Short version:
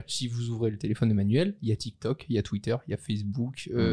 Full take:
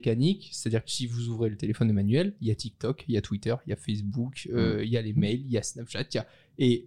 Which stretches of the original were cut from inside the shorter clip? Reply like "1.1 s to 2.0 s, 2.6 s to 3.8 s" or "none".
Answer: none